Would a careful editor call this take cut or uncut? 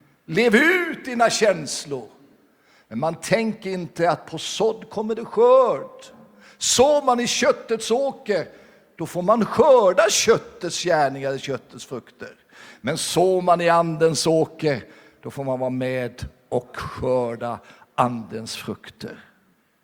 uncut